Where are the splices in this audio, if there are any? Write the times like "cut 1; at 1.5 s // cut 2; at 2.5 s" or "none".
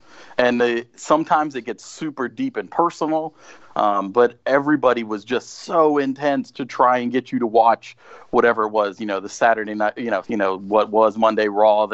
cut 1; at 3.6 s // cut 2; at 10.2 s

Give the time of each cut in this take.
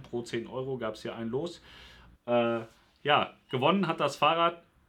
cut 1; at 2.1 s

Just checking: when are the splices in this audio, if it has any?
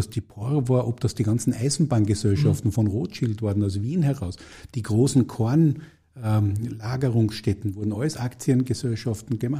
none

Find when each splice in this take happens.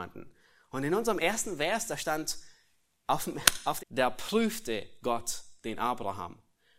cut 1; at 3.8 s

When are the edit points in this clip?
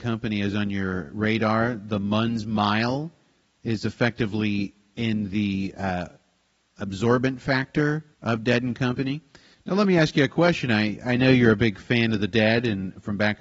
cut 1; at 8.1 s // cut 2; at 9.5 s

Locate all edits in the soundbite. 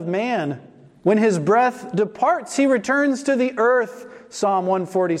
none

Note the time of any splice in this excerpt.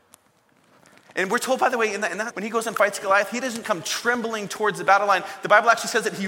cut 1; at 2.3 s // cut 2; at 3.6 s

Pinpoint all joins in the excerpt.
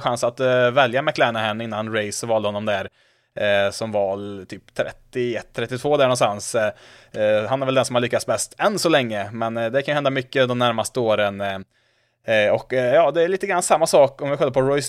none

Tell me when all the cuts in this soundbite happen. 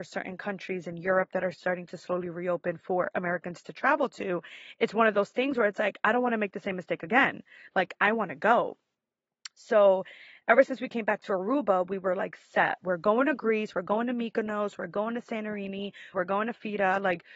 cut 1; at 16.1 s

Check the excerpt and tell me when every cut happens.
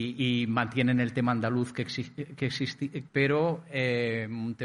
cut 1; at 3.1 s

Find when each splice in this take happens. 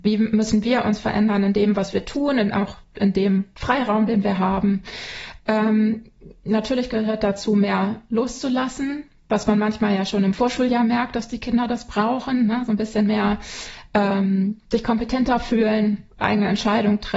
cut 1; at 5.4 s

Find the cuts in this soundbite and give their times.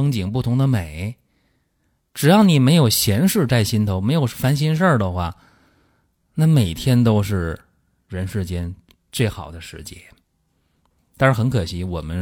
none

